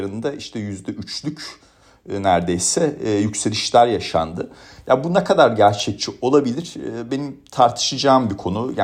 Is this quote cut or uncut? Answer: uncut